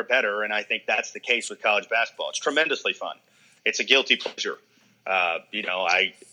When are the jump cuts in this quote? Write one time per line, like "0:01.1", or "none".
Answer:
none